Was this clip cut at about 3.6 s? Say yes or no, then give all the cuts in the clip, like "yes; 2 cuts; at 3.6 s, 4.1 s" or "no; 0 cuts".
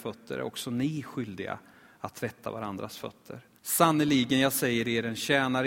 yes; 1 cut; at 3.6 s